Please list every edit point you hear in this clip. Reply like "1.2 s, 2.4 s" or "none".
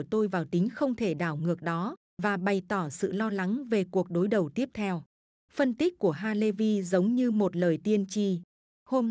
none